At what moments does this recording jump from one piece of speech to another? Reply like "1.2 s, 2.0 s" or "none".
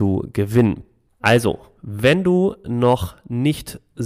1.1 s, 2.6 s